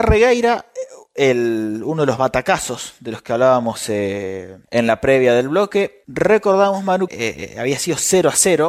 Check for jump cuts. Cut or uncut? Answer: cut